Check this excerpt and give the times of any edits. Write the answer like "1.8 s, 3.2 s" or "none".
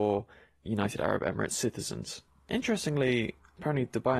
none